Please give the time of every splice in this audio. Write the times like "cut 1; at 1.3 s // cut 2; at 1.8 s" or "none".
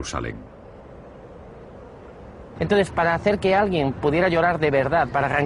cut 1; at 2.6 s

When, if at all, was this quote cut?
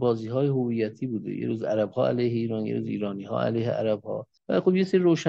cut 1; at 4.4 s

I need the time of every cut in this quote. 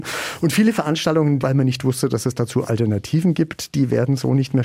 cut 1; at 1.4 s

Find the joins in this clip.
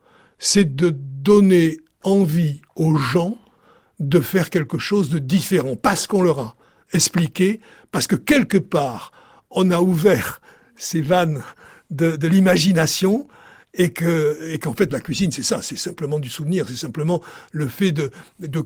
none

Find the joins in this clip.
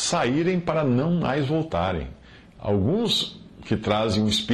none

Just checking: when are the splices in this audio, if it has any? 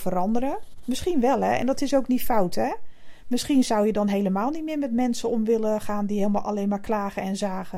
none

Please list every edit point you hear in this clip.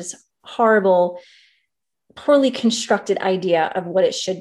cut 1; at 1.9 s

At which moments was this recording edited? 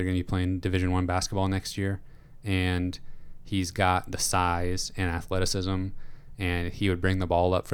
none

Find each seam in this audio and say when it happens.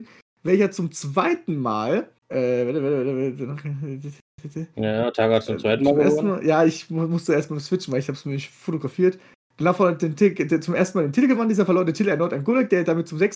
cut 1; at 2.2 s

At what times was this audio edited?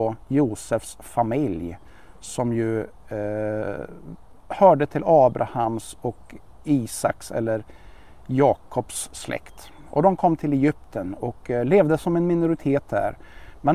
none

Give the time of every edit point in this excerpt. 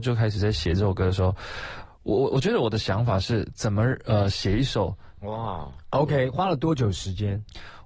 cut 1; at 1.8 s // cut 2; at 5.2 s

